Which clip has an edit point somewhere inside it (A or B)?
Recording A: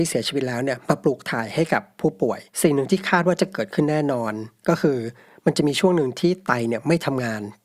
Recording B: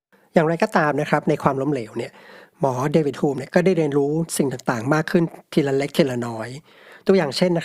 A